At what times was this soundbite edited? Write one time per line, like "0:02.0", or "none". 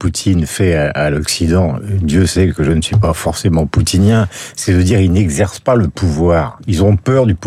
none